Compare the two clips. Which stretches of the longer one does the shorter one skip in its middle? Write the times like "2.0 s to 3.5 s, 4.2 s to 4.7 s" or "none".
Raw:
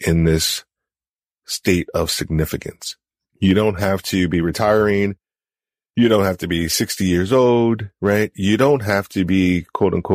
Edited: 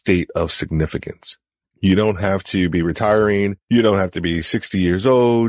5.2 s to 5.9 s